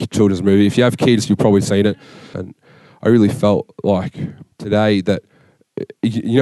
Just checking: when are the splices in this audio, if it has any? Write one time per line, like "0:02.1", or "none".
0:02.3
0:04.5